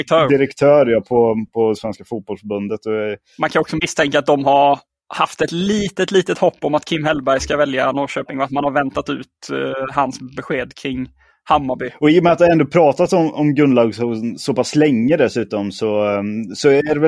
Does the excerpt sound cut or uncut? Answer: uncut